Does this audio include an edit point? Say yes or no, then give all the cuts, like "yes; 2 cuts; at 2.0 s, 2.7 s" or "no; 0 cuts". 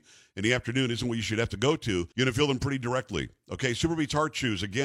yes; 1 cut; at 2.1 s